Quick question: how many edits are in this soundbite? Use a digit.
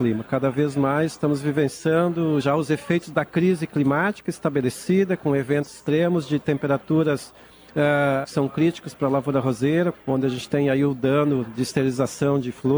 3